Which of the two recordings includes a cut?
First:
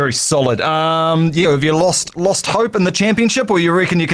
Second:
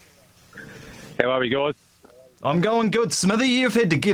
first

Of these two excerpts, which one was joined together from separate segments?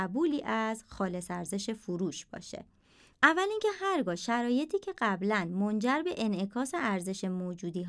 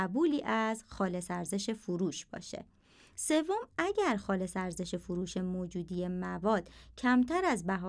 first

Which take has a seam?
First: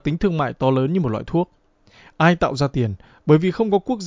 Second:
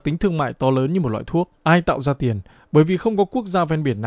second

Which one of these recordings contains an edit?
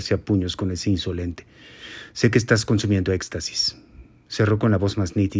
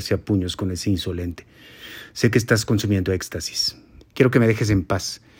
second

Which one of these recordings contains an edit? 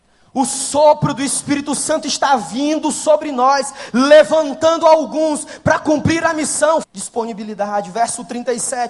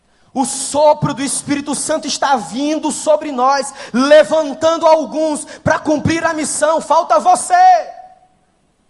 first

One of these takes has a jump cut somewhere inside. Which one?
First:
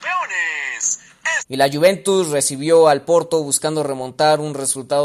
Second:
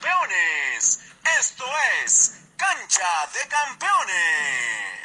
first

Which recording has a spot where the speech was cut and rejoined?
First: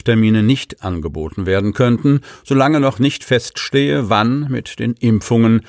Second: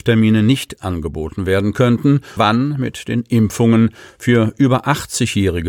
second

